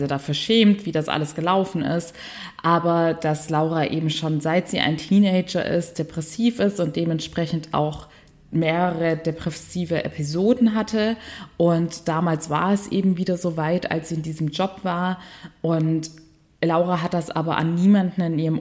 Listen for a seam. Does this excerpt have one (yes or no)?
no